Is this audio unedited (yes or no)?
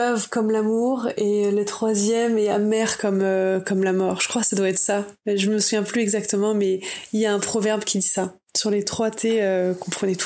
yes